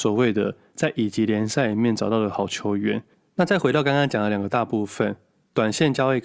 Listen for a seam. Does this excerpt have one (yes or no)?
no